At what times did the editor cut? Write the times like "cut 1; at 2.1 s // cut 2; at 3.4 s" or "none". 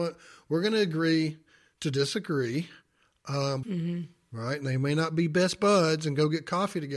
cut 1; at 3.6 s